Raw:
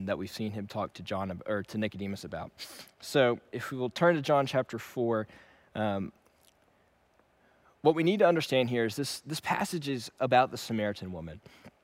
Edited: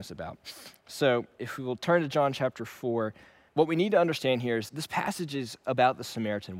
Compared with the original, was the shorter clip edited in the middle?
yes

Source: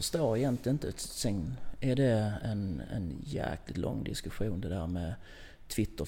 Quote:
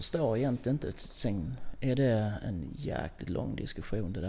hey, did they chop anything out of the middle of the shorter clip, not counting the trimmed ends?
yes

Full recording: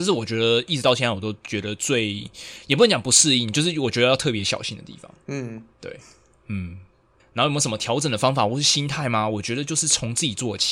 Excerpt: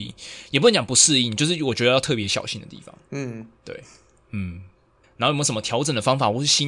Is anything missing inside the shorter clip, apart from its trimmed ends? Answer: no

